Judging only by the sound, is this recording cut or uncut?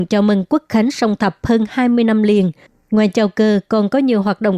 uncut